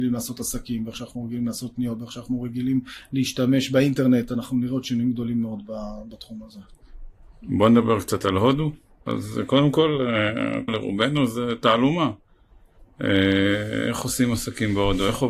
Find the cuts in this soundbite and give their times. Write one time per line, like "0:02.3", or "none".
0:09.1
0:10.7